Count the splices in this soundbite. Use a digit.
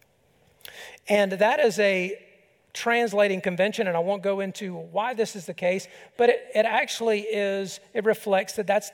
0